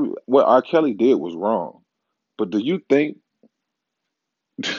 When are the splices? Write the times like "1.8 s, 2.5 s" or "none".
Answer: none

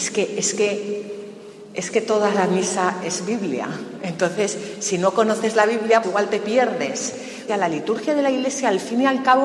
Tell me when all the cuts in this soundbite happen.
6.0 s, 7.5 s

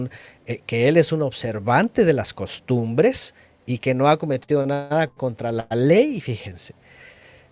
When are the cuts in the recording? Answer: none

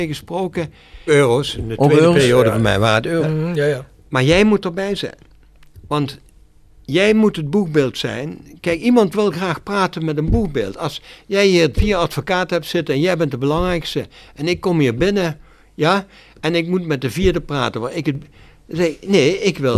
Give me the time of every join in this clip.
1.1 s, 3.2 s

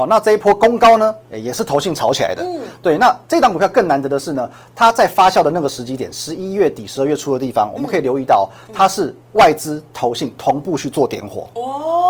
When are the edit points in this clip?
none

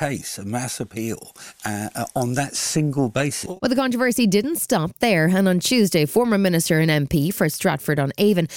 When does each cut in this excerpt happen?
none

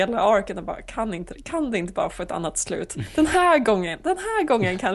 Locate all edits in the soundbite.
none

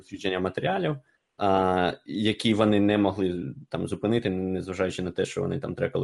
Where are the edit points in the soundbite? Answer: none

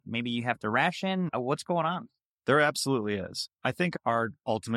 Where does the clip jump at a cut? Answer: 3.5 s

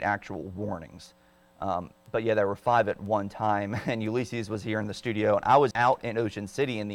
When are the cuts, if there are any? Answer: 5.7 s

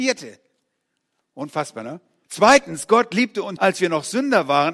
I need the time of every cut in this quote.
2.2 s, 3.6 s

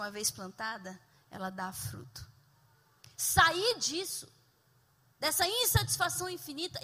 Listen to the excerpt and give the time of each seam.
3.1 s

